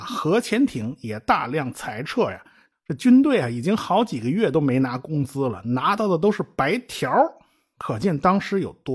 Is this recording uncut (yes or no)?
no